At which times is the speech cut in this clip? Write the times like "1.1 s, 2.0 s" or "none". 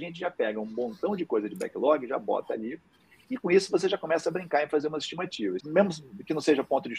5.6 s